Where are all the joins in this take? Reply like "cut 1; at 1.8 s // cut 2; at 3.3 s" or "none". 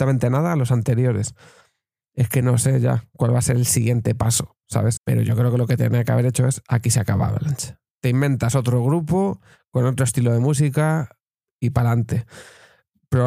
cut 1; at 5.0 s

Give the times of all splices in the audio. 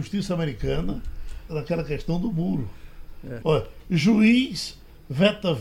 cut 1; at 1.5 s // cut 2; at 3.4 s

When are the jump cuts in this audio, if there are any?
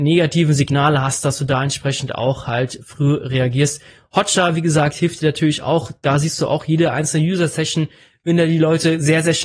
none

